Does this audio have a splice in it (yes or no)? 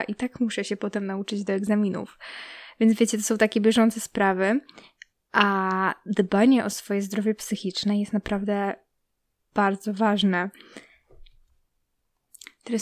no